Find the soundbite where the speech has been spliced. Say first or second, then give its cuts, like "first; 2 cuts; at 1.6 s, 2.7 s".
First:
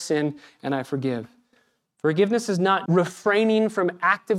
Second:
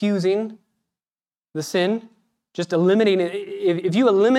first; 1 cut; at 2.9 s